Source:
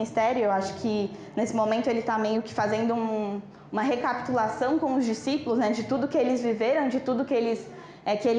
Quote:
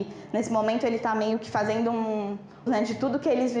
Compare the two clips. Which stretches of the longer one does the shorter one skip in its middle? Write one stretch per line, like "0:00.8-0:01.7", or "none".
0:03.7-0:05.6